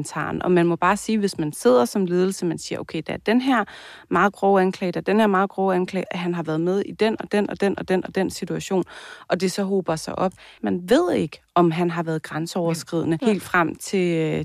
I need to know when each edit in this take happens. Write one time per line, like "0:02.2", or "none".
0:06.1
0:10.6
0:13.2